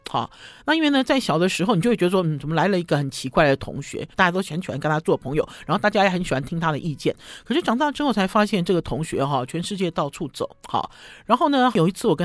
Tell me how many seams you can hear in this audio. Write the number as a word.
one